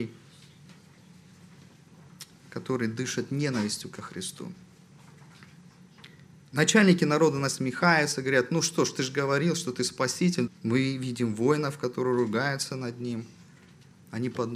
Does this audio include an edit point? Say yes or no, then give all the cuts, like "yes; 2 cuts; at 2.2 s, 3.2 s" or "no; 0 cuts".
yes; 1 cut; at 10.5 s